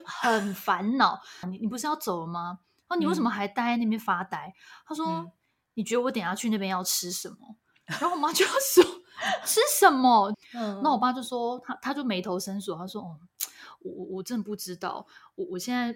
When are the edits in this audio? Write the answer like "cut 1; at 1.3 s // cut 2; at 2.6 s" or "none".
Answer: cut 1; at 1.4 s // cut 2; at 10.3 s